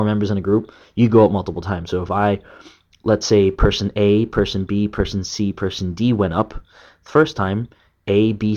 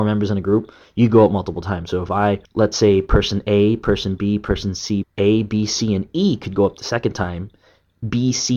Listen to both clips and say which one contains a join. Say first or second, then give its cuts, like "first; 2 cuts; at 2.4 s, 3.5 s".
second; 2 cuts; at 2.4 s, 5.0 s